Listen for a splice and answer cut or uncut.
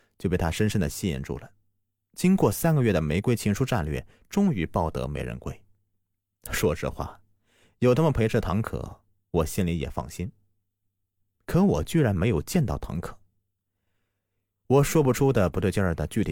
uncut